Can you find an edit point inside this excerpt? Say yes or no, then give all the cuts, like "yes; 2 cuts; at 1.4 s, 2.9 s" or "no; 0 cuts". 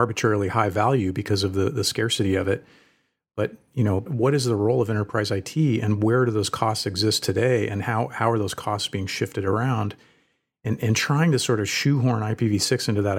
yes; 1 cut; at 4.1 s